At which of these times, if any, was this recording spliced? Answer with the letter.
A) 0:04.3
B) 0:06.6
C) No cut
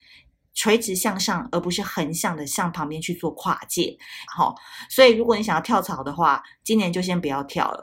A